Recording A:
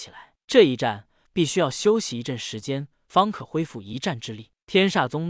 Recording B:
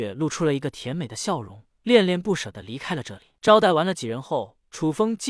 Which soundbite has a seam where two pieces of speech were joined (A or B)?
A